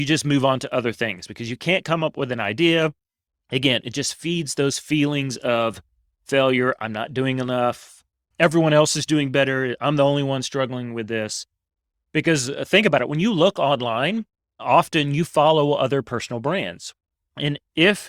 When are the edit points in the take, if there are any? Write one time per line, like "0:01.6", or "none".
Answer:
0:14.6